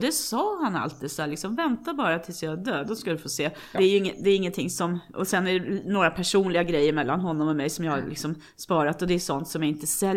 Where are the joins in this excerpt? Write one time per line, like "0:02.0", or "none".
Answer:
0:03.7